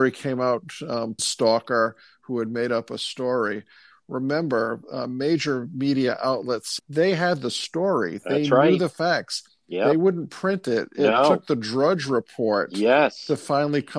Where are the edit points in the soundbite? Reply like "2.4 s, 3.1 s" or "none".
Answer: 1.2 s, 6.8 s

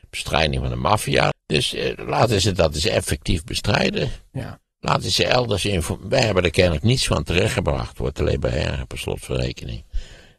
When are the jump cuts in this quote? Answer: 1.3 s

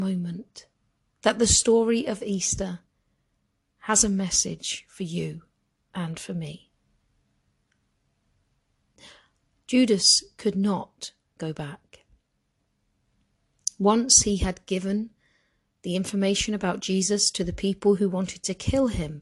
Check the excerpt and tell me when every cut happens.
none

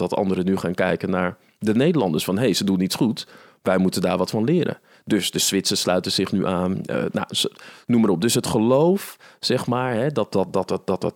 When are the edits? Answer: none

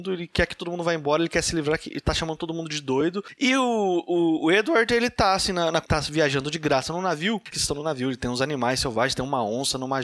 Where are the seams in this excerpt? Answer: 5.8 s, 7.5 s

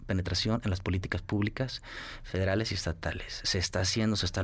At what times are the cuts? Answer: none

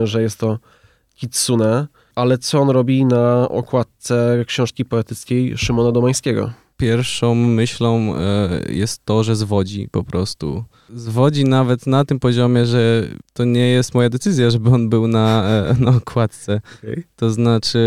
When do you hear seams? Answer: none

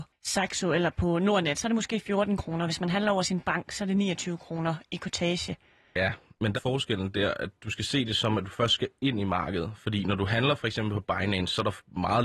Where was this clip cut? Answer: 6.5 s

